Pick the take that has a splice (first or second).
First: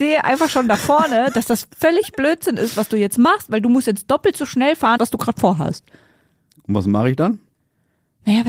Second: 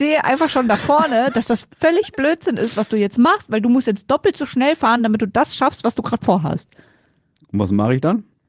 first